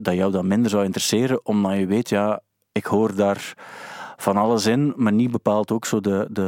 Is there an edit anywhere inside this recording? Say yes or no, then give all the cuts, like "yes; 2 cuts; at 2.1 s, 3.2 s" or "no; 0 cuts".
no; 0 cuts